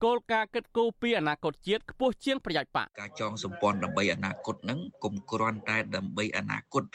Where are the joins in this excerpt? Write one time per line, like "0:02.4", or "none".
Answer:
0:02.9